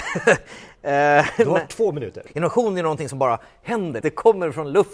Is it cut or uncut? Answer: cut